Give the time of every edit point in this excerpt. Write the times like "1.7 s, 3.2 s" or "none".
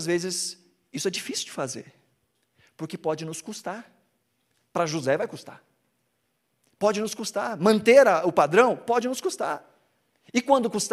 none

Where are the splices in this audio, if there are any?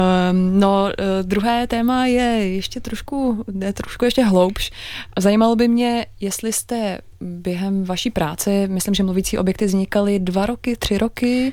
5.1 s

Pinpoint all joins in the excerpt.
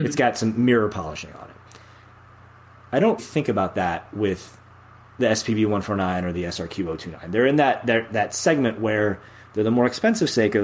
3.2 s

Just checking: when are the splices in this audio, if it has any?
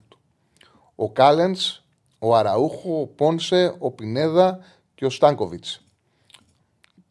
none

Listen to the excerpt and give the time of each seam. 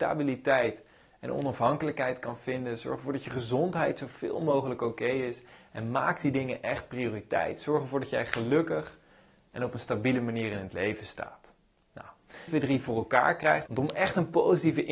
12.5 s, 13.7 s

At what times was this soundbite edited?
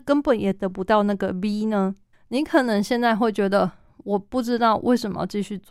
2.1 s

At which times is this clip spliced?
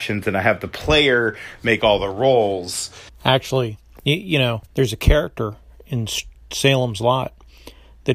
3.1 s, 4.7 s

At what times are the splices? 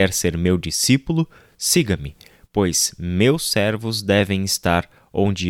none

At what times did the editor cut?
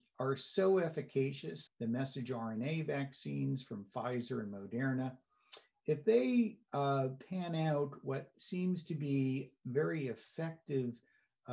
1.7 s

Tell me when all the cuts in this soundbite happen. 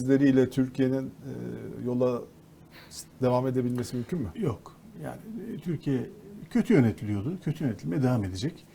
none

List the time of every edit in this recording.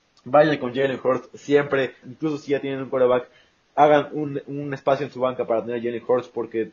2.0 s

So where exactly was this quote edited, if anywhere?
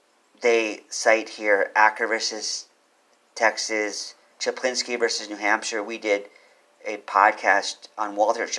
4.3 s

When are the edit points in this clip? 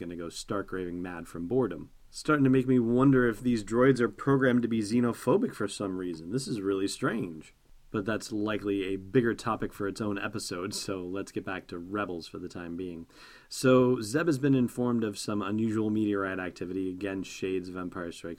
2.0 s

